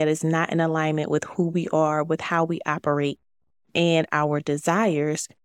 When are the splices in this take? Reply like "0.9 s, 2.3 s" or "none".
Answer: none

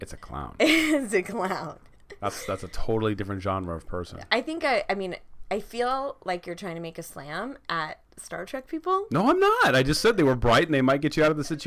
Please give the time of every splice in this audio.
none

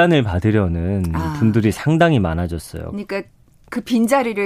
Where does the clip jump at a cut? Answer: none

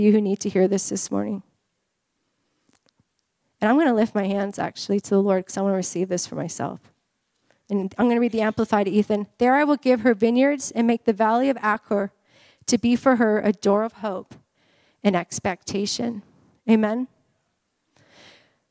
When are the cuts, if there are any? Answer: none

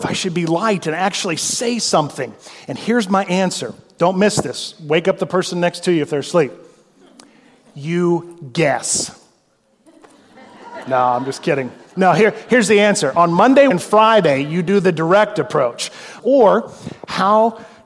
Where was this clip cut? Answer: 13.7 s, 16.2 s

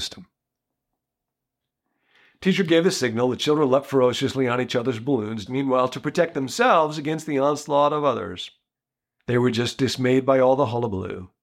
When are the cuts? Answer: 5.5 s, 9.2 s

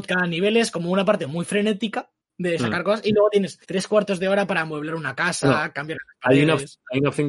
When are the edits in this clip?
3.6 s

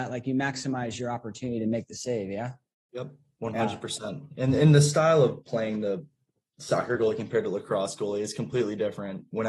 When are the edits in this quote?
none

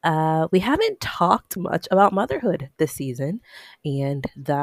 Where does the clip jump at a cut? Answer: 1.6 s

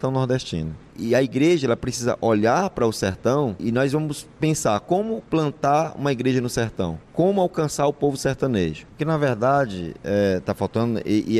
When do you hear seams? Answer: 3.6 s, 8.9 s

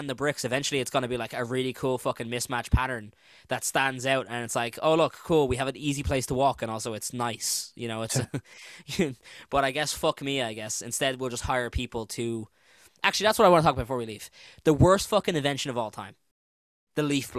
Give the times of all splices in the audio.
none

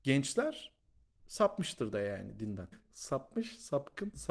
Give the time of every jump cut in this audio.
2.7 s

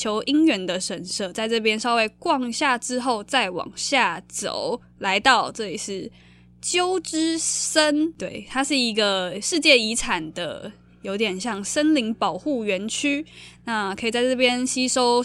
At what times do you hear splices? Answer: none

